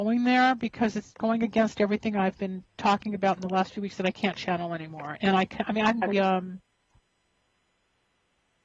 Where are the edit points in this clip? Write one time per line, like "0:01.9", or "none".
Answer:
0:06.1